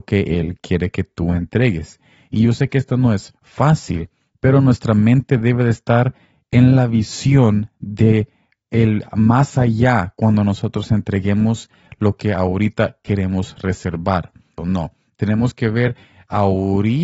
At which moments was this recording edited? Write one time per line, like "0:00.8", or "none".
0:14.6